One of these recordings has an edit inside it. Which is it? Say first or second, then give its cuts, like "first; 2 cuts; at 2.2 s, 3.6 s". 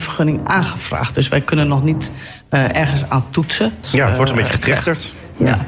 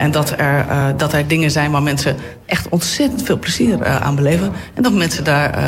first; 1 cut; at 3.8 s